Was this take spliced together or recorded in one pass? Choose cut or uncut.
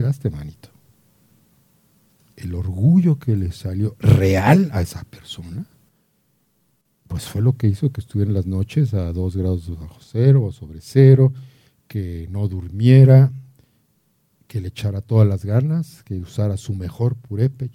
uncut